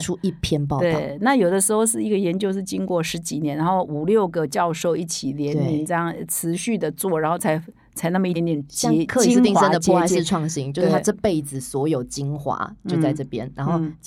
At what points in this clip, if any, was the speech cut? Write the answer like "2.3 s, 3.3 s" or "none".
8.3 s